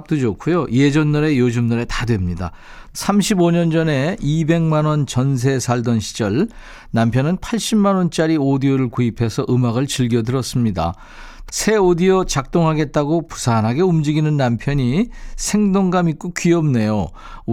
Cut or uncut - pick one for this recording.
cut